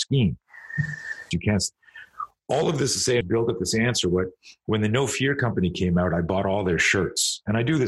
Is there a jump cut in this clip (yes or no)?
yes